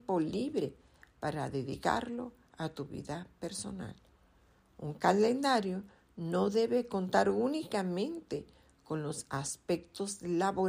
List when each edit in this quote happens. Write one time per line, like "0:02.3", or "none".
none